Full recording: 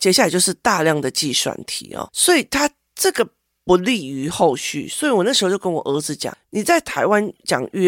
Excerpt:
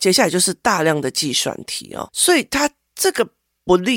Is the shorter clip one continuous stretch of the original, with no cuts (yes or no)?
yes